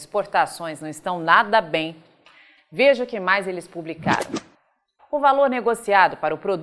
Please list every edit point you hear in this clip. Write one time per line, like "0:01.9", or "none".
0:05.0